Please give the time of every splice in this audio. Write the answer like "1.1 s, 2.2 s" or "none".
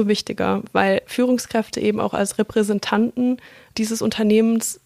none